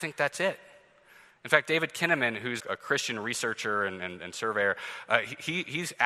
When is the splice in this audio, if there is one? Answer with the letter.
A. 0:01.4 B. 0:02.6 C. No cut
B